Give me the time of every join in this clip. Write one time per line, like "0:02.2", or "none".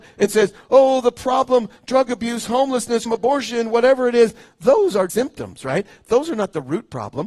0:03.1
0:05.1